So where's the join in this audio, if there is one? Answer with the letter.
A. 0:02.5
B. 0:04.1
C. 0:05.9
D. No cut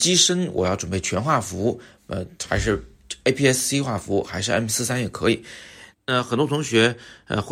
C